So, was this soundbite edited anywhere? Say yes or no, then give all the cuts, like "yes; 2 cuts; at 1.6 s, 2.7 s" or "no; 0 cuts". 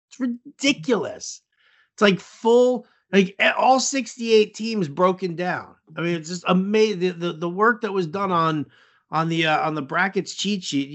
no; 0 cuts